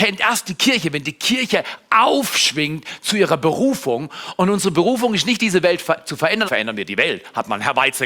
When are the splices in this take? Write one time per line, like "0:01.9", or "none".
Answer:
0:06.5